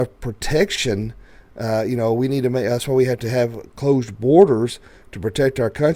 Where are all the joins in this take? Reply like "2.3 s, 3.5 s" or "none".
none